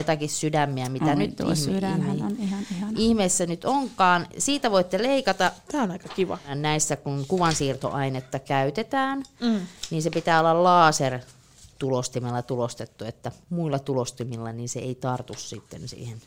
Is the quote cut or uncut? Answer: uncut